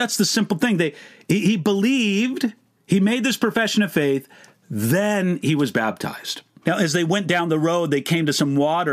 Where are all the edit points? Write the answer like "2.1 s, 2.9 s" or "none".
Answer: 6.6 s